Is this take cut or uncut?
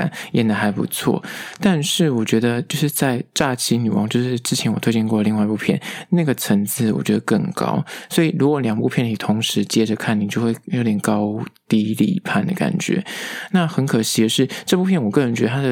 uncut